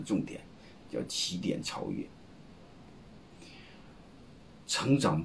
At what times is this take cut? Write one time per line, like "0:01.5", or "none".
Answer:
none